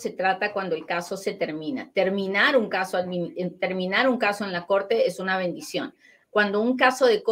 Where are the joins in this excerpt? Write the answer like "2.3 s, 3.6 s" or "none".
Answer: 6.2 s